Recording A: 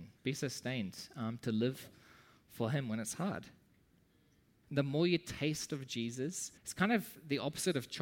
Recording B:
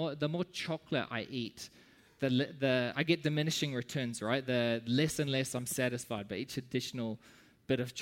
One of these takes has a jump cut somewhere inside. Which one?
A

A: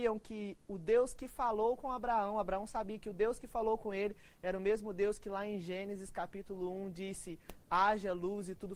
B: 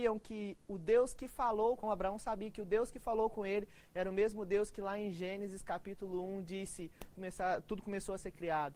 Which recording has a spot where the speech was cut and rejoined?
B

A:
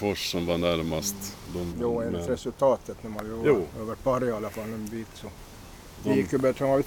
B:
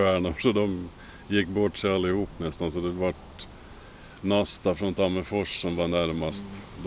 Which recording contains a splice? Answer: A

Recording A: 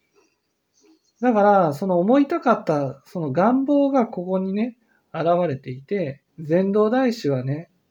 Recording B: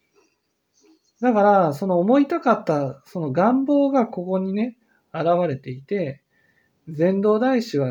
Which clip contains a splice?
A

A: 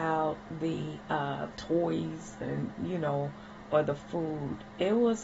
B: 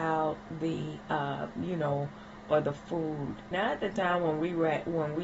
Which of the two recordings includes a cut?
B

